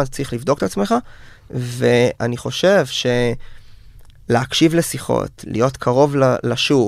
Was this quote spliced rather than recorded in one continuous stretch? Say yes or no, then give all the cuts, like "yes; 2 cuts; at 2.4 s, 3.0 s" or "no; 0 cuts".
no; 0 cuts